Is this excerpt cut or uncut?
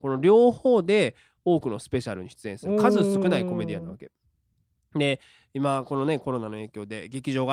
uncut